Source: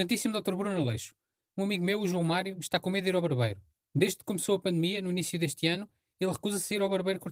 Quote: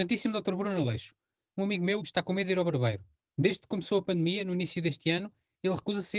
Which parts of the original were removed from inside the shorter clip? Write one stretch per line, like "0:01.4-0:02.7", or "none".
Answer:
0:02.0-0:02.6

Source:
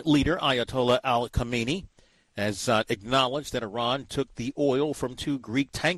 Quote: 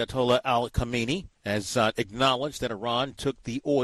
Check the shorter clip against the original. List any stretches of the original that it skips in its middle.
0:01.9-0:02.3

